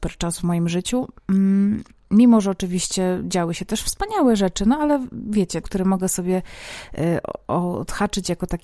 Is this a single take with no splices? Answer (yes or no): no